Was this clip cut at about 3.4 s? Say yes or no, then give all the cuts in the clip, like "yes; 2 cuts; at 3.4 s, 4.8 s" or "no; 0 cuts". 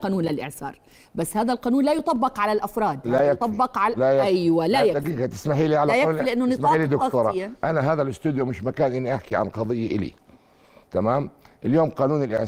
no; 0 cuts